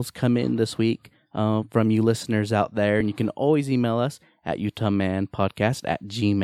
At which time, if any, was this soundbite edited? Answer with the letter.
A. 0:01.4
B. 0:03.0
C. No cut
C